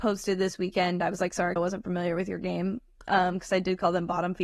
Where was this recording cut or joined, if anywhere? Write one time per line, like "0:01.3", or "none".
0:01.6